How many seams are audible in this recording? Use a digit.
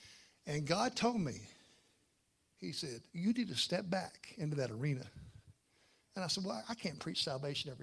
1